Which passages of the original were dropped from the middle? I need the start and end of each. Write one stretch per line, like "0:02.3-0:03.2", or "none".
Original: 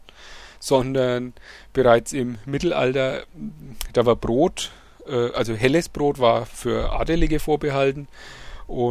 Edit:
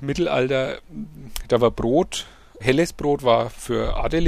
0:05.0-0:05.6